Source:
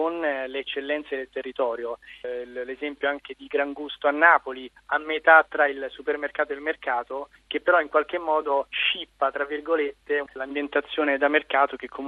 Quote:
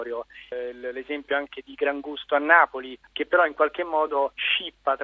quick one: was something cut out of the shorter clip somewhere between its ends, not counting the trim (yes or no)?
yes